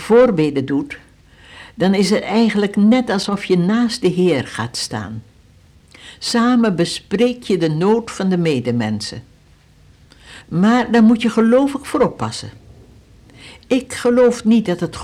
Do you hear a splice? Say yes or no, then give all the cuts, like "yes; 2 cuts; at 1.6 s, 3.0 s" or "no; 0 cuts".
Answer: yes; 1 cut; at 10.4 s